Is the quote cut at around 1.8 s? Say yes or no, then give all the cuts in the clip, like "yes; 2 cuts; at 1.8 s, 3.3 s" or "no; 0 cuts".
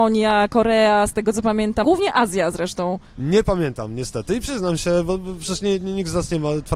yes; 2 cuts; at 1.8 s, 3.2 s